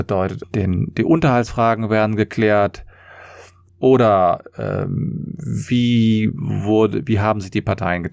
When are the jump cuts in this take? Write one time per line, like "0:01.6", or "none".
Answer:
0:03.7